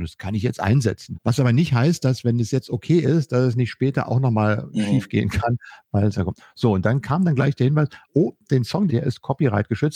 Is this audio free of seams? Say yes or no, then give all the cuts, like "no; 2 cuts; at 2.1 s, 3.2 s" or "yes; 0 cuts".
no; 2 cuts; at 1.1 s, 8.9 s